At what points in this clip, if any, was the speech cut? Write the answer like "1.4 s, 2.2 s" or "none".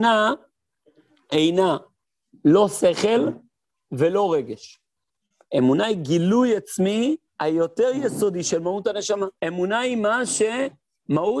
5.5 s, 7.3 s, 9.4 s

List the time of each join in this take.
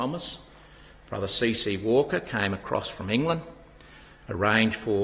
none

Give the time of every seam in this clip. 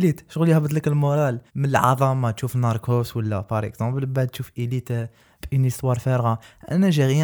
1.5 s

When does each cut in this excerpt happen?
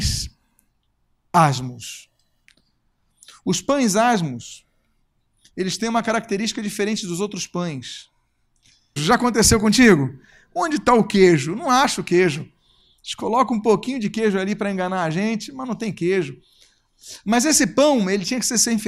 9.0 s

